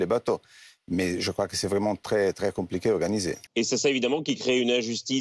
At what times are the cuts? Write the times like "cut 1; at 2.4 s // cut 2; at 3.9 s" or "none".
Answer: cut 1; at 3.5 s